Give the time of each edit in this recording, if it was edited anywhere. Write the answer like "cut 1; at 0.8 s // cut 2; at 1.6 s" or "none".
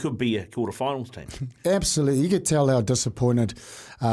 cut 1; at 1.6 s

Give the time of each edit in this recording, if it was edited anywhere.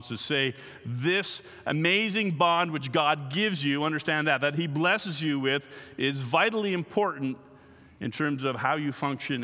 none

